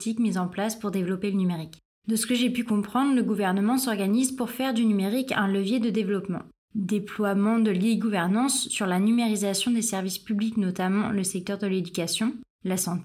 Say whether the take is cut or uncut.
cut